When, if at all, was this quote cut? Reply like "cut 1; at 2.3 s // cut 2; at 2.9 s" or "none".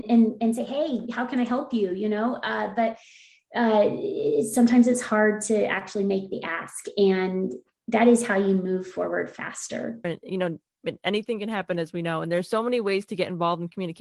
cut 1; at 10.0 s